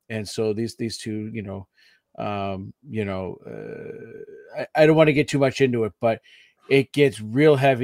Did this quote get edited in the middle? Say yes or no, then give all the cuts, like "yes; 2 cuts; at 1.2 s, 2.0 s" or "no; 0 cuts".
no; 0 cuts